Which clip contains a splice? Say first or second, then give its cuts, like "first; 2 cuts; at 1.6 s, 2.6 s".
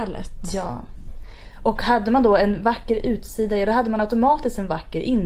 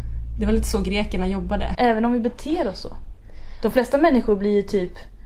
second; 1 cut; at 1.7 s